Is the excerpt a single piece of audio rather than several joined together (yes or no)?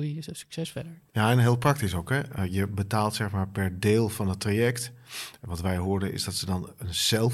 yes